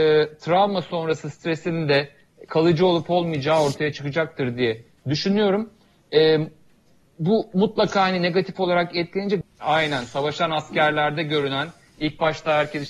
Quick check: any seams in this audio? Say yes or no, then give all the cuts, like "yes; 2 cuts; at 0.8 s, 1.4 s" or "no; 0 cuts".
yes; 1 cut; at 9.4 s